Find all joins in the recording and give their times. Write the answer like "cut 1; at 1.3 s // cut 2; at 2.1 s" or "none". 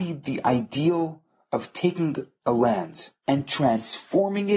cut 1; at 3.2 s